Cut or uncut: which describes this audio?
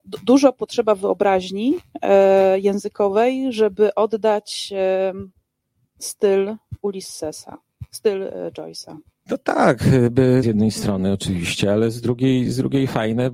cut